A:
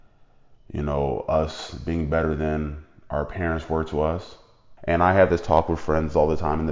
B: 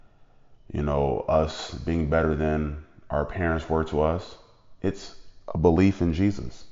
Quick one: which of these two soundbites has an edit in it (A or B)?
A